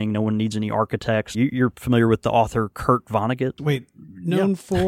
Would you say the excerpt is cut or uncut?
cut